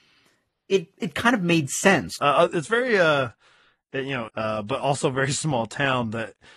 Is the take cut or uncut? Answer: cut